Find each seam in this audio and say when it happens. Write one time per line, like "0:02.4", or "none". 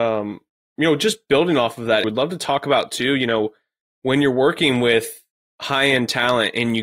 0:02.0

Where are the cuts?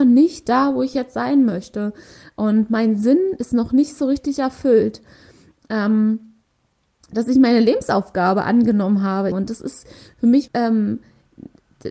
0:09.3
0:10.5

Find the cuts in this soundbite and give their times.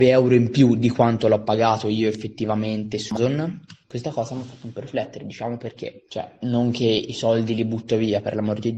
none

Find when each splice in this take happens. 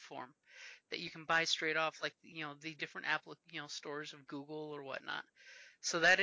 none

